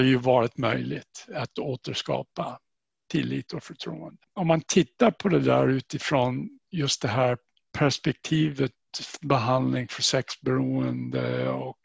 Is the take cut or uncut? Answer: uncut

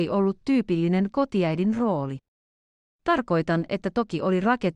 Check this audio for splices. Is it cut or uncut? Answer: uncut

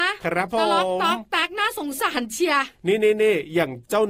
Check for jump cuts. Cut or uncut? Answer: uncut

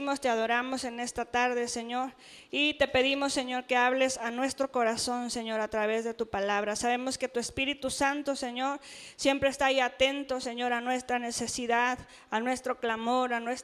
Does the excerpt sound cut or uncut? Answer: uncut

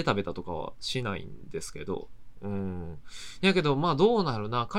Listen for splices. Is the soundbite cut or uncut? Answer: uncut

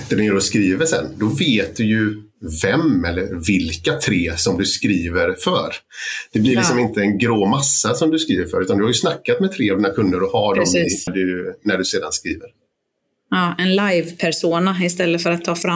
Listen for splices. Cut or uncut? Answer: cut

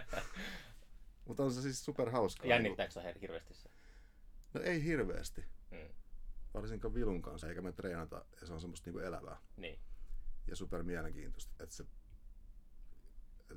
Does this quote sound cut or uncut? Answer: cut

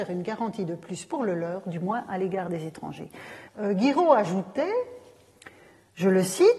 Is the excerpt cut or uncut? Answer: cut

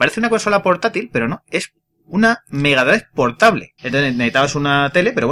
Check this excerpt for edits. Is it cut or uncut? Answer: cut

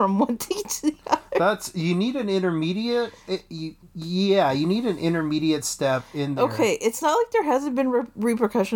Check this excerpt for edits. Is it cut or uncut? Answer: uncut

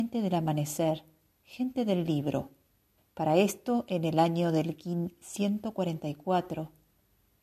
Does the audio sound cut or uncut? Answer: cut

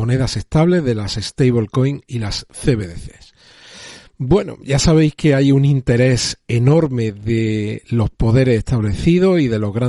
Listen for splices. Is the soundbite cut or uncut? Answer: uncut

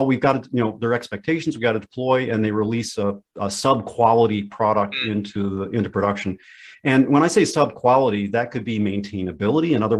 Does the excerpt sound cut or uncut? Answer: uncut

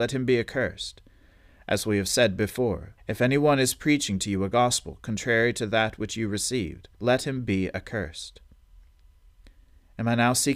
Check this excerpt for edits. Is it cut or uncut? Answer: cut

